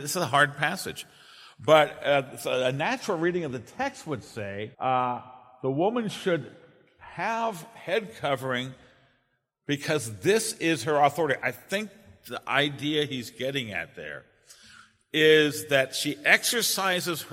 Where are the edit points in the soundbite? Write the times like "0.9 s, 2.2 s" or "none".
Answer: 4.7 s, 11.4 s